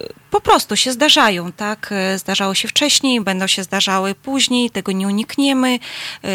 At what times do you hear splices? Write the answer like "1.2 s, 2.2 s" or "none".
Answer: none